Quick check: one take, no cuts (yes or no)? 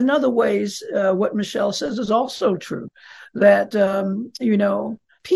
yes